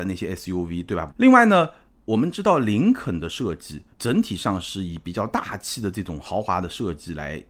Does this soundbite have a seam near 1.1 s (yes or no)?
yes